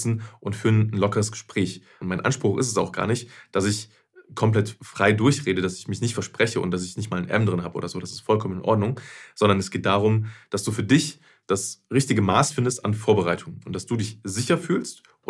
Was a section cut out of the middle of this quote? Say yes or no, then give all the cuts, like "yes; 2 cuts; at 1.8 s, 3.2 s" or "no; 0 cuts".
yes; 1 cut; at 2.0 s